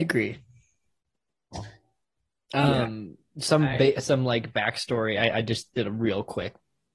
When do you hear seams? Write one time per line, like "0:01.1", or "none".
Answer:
none